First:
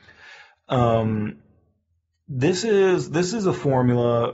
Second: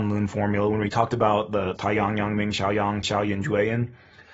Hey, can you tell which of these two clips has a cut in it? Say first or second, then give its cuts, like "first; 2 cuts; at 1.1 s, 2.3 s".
second; 2 cuts; at 1.8 s, 3.0 s